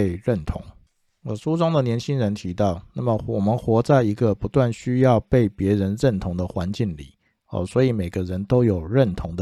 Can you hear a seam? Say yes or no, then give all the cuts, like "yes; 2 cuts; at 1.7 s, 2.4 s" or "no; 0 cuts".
no; 0 cuts